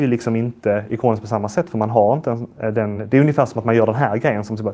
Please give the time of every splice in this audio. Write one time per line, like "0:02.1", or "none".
none